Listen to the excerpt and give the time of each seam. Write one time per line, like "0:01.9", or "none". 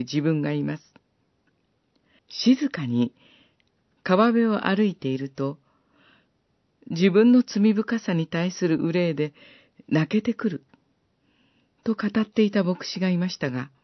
0:02.2